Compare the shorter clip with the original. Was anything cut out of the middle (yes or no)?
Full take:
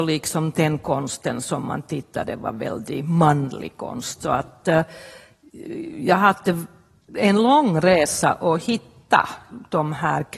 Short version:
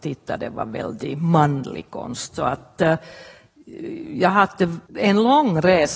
yes